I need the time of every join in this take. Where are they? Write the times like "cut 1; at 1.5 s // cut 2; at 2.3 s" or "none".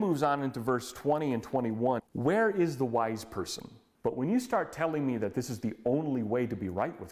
cut 1; at 2.0 s // cut 2; at 3.9 s

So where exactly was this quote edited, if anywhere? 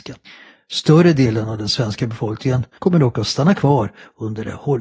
cut 1; at 2.8 s

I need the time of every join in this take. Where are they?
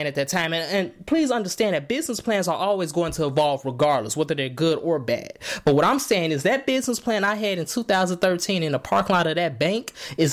none

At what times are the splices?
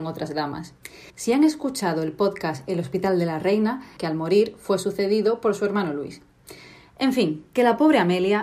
cut 1; at 1.1 s // cut 2; at 4.0 s

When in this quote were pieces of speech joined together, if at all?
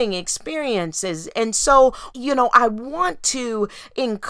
cut 1; at 2.1 s

